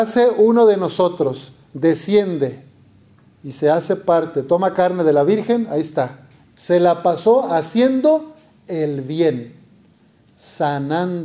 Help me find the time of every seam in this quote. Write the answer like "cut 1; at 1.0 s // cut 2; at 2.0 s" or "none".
cut 1; at 6.5 s